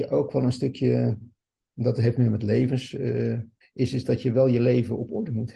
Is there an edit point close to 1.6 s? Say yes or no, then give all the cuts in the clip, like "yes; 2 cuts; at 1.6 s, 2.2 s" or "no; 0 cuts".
no; 1 cut; at 3.6 s